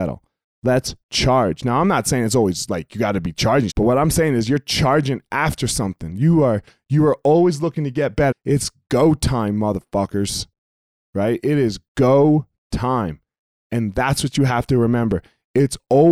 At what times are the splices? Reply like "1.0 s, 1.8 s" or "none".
3.7 s, 8.3 s